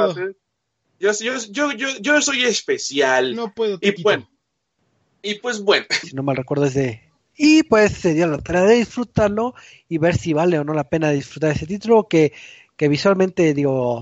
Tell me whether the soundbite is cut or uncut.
cut